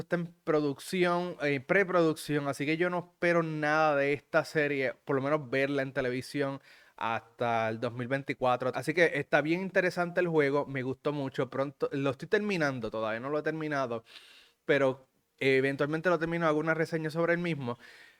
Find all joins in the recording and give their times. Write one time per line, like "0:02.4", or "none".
0:08.7